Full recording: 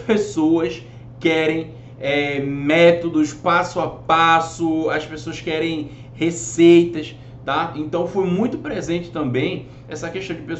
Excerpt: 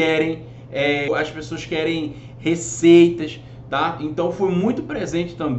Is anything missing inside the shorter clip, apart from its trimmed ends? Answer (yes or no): yes